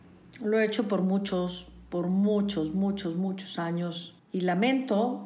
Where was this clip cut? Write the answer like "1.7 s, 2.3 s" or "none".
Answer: none

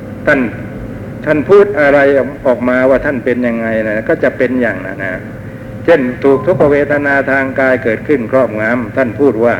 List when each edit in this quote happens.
5.0 s

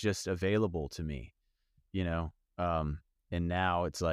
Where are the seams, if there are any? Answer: none

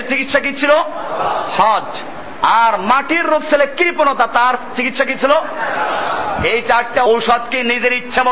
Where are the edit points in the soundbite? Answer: 7.1 s

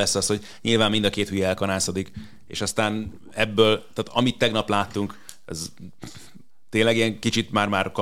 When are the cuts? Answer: none

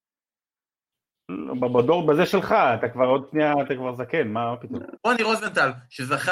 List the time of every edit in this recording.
5.0 s

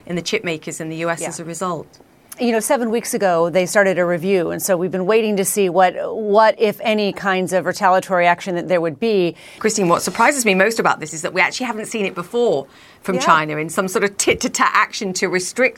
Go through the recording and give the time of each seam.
9.6 s

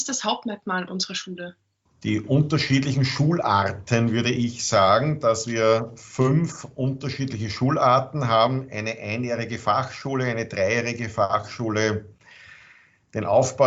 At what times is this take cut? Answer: none

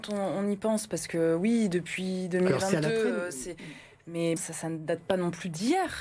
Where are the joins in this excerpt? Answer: 4.4 s

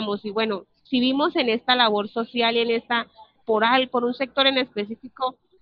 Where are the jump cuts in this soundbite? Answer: 3.4 s

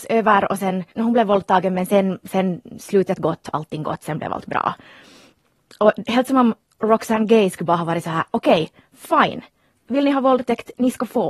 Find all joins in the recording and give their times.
0.9 s

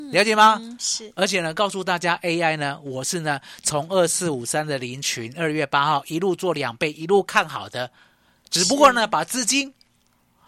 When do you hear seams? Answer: none

